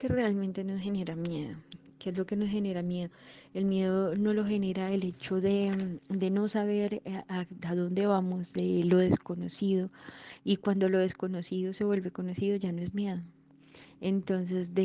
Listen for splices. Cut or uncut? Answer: uncut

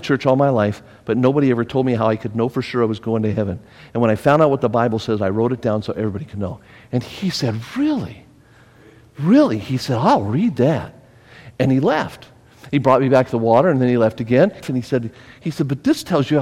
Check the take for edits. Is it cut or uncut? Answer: cut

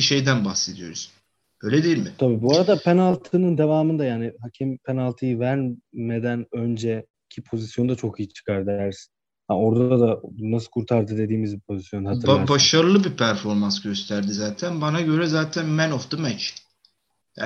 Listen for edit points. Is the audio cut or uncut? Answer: uncut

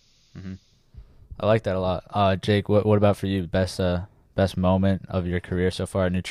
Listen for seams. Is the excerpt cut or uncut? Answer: uncut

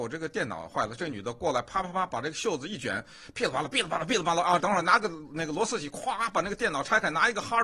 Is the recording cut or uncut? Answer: cut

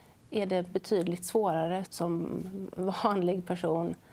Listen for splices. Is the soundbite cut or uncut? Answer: cut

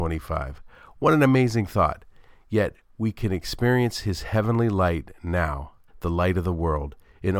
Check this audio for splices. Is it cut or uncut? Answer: cut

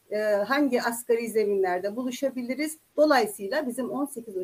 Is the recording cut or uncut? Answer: cut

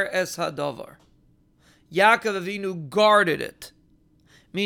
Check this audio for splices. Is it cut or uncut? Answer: uncut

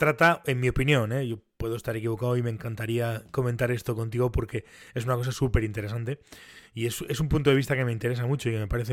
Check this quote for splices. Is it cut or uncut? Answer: uncut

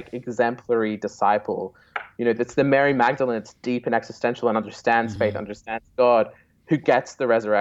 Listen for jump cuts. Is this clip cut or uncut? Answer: uncut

